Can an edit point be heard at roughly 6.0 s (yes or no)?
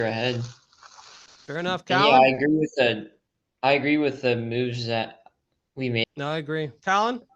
yes